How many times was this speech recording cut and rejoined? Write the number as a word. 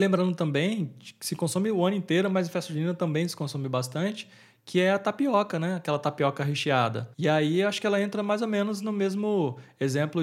one